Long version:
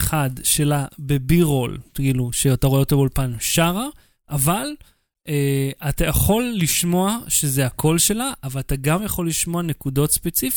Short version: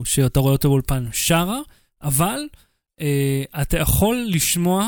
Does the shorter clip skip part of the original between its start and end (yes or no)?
no